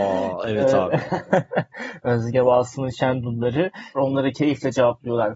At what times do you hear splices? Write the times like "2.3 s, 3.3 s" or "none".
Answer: 4.0 s